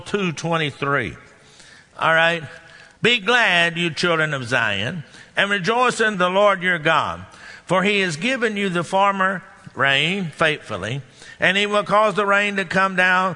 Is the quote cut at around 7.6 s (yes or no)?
no